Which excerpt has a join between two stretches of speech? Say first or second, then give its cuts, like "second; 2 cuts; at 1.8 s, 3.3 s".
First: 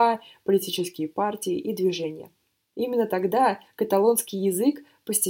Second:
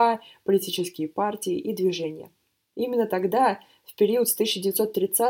first; 1 cut; at 3.7 s